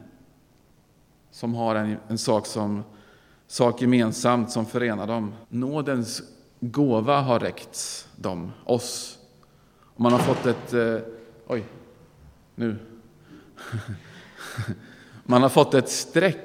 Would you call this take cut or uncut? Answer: cut